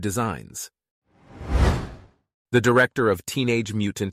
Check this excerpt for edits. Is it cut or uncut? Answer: uncut